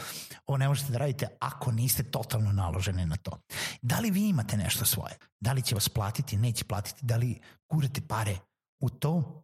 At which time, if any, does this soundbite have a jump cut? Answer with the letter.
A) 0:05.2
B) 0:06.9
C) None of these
A